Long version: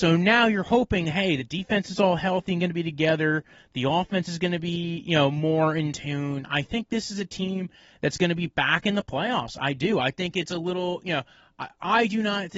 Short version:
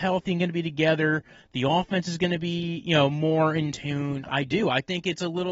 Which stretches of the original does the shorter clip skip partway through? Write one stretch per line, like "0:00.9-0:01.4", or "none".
0:06.5-0:09.6

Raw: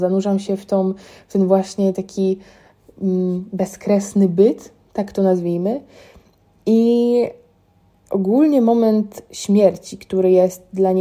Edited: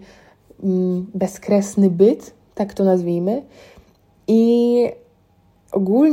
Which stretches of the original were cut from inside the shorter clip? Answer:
none

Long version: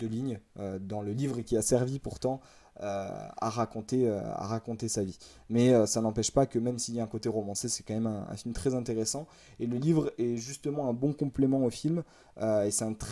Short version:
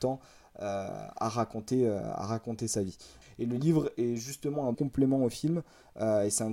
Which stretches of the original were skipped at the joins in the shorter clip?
0:05.4-0:09.4
0:11.0-0:11.2

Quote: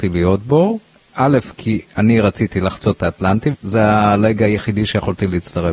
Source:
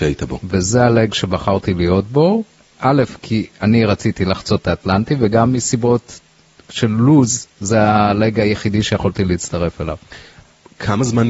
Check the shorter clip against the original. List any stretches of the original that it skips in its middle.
0:05.2-0:07.5

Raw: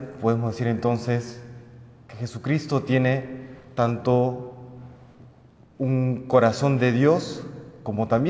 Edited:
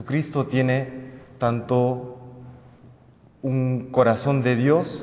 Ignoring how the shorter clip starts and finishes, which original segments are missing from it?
none

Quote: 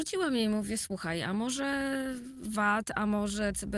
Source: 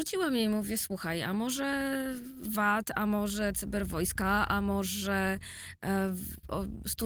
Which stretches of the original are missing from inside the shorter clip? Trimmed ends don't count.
none

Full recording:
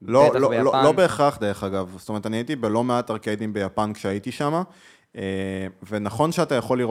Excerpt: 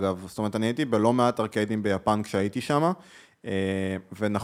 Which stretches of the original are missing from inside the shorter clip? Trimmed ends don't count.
none

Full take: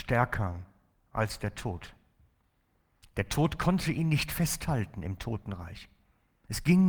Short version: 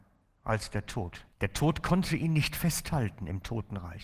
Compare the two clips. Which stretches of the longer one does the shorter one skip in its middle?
0:02.0-0:03.1

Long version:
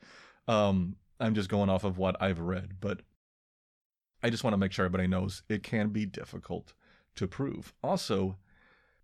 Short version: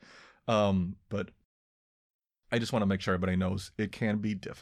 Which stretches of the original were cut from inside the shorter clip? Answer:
0:01.1-0:02.8

